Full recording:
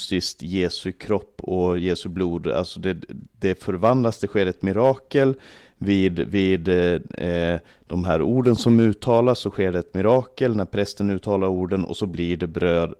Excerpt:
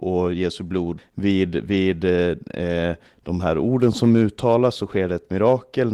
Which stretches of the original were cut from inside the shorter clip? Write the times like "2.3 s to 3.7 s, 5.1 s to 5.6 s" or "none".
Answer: 2.4 s to 5.6 s

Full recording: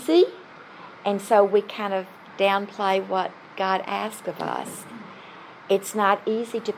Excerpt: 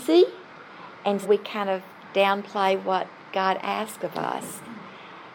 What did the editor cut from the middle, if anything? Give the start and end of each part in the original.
1.2 s to 1.5 s

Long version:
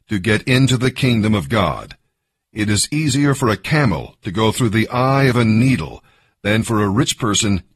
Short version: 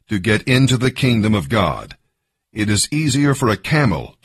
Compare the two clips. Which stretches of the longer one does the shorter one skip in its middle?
none

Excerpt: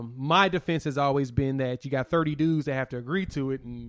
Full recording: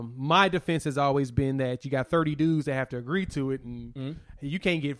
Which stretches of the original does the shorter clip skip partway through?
none

